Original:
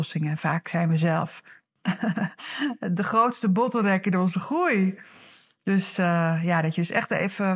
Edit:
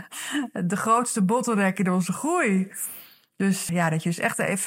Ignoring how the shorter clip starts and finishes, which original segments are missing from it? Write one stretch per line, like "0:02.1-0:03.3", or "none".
0:06.0-0:06.4